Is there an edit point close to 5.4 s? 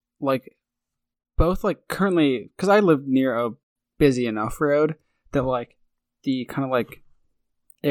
no; 0 cuts

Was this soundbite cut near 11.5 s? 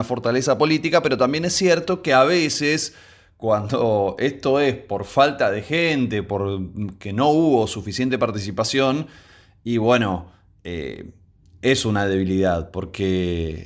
no; 0 cuts

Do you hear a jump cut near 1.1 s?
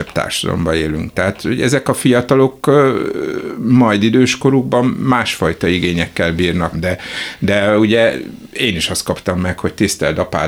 no; 1 cut; at 6.7 s

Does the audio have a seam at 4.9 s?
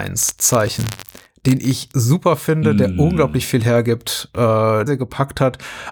yes; 1 cut; at 4.9 s

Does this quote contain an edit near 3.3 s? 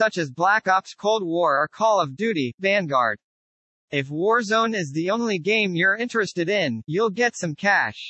no; 0 cuts

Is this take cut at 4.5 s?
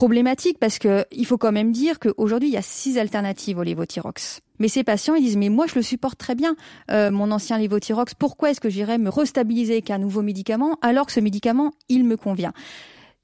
yes; 1 cut; at 4.5 s

